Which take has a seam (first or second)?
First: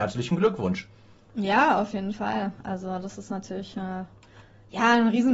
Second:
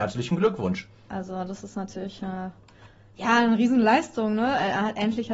second